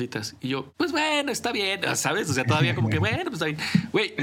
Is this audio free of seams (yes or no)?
yes